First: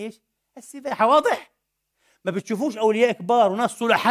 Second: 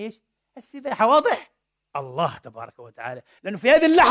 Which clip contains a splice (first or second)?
second